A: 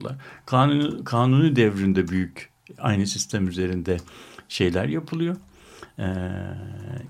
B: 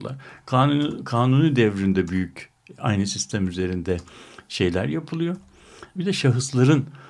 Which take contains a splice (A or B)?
B